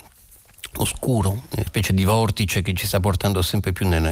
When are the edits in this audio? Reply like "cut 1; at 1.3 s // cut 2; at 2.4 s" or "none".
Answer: cut 1; at 1.7 s